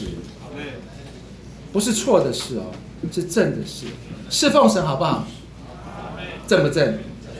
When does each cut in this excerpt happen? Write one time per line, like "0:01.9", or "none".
none